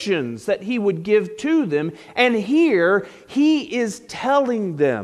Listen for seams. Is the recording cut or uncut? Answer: uncut